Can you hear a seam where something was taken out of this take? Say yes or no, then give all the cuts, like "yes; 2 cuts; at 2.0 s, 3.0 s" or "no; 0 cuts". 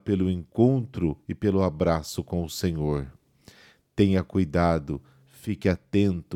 no; 0 cuts